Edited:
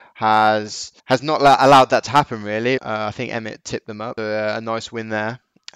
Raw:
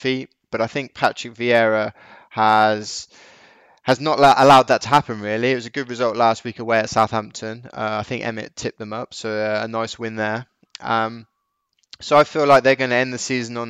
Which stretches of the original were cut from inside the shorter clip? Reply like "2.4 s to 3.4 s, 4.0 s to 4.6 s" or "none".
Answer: 3.2 s to 3.8 s, 5.6 s to 7.7 s, 9.1 s to 9.2 s